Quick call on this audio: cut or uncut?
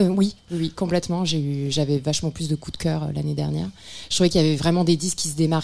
uncut